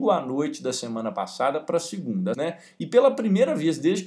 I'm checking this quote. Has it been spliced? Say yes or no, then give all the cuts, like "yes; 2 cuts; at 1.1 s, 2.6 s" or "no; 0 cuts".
yes; 1 cut; at 2.3 s